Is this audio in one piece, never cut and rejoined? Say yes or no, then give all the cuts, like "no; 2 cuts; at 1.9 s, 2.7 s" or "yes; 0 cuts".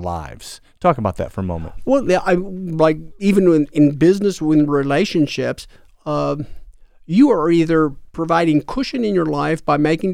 yes; 0 cuts